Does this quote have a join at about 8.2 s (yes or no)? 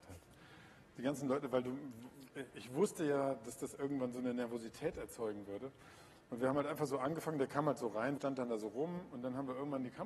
yes